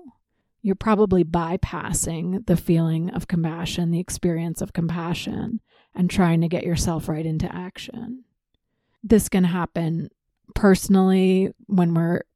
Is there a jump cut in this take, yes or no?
no